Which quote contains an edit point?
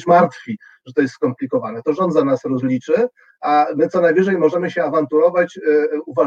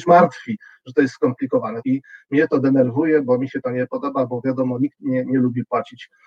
second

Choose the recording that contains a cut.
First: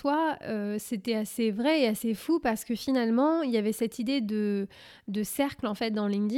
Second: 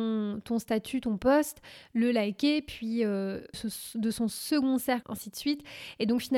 second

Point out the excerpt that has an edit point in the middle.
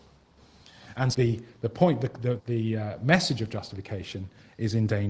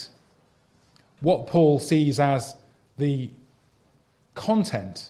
first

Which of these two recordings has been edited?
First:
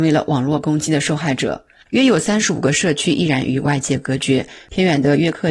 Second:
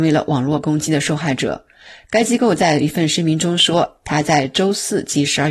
first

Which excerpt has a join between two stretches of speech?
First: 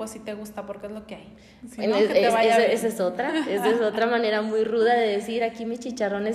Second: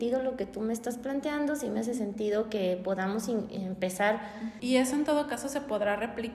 second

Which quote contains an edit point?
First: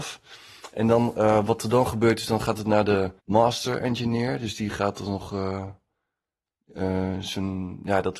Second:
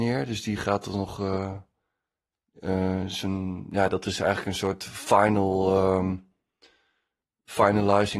first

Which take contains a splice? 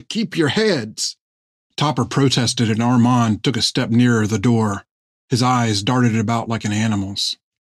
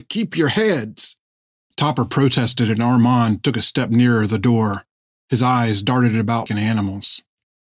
second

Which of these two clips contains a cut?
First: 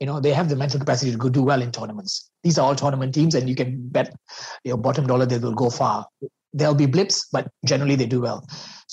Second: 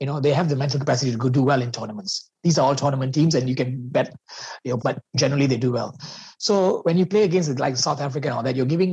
second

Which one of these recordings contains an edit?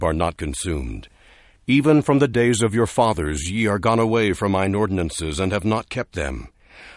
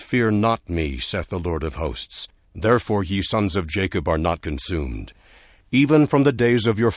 second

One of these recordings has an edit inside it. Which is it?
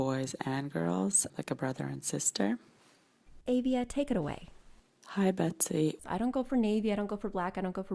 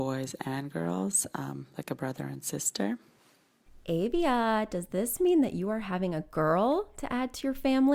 first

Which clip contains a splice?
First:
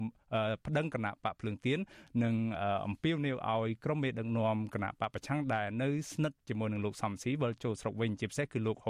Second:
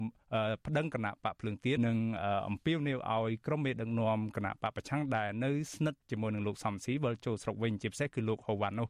second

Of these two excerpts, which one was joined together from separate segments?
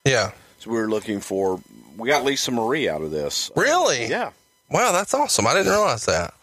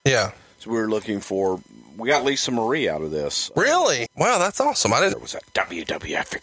second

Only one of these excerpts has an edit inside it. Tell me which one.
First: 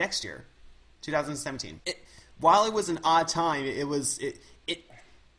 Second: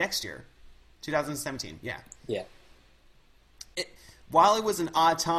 first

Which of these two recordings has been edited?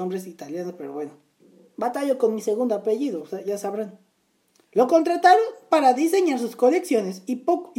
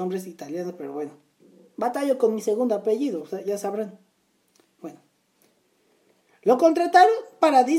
first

